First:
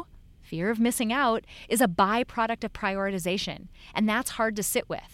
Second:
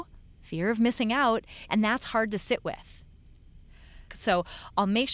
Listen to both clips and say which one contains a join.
second; 2 cuts; at 1.7 s, 4.1 s

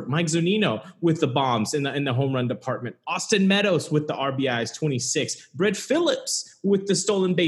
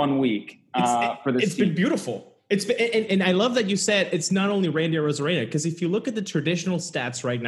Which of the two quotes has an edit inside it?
second; 1 cut; at 3.1 s

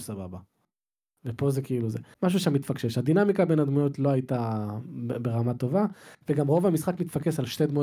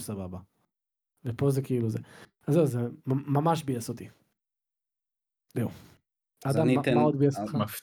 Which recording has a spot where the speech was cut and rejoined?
first; 1 cut; at 2.1 s

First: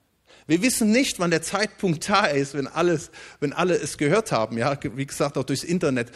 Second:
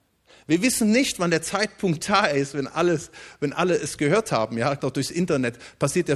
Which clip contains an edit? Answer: second; 1 cut; at 4.8 s

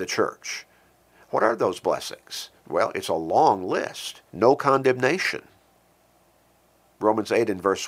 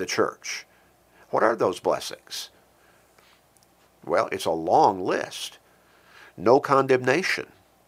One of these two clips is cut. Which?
first; 2 cuts; at 2.6 s, 4.3 s

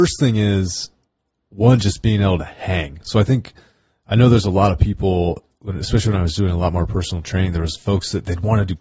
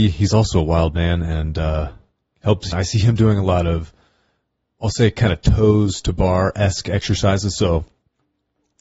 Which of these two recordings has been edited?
second; 1 cut; at 2.7 s

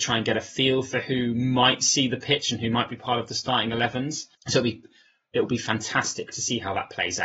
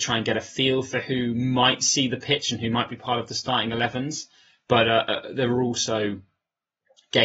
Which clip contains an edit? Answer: first; 1 cut; at 4.4 s

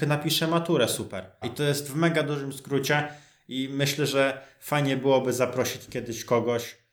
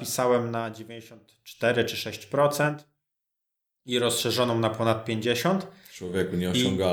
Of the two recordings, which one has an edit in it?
first; 1 cut; at 1.4 s

